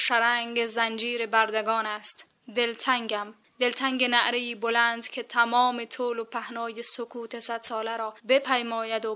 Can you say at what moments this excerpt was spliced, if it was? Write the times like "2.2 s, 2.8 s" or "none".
8.2 s

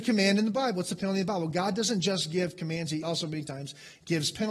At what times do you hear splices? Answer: none

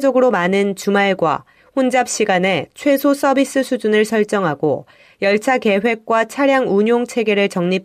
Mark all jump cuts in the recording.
none

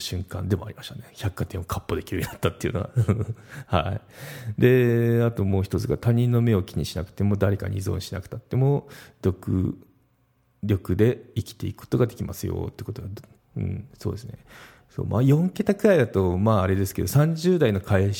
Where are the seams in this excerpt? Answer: none

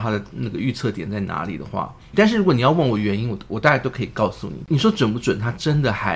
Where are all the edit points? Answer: 2.1 s

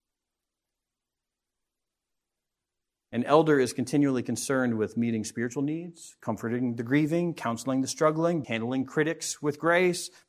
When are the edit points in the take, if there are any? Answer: 8.4 s

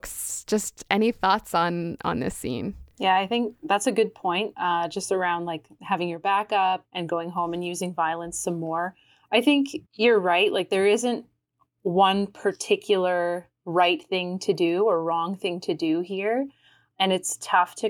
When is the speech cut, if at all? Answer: 9.8 s

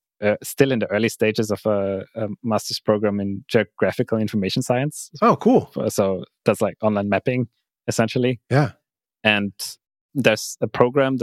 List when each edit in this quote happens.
none

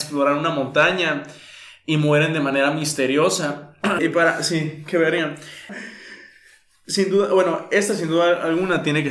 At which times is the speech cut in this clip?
4.0 s, 5.7 s

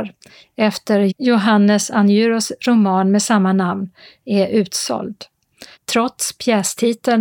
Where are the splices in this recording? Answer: 5.7 s

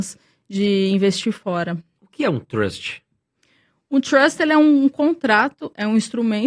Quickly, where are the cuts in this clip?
none

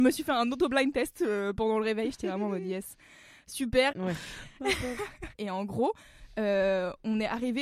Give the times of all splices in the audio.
3.9 s, 5.3 s

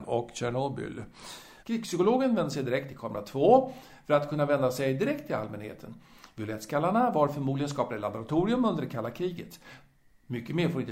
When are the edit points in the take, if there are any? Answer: 1.6 s

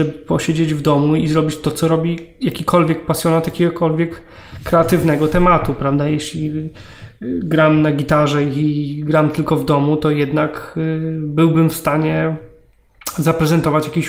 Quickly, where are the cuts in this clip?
none

